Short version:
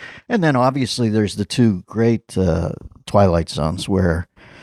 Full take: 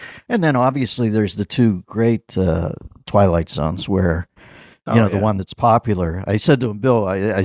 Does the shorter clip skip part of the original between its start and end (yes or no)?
no